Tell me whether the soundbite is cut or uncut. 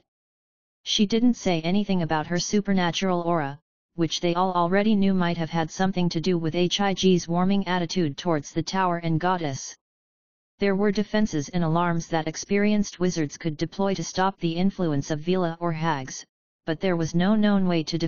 uncut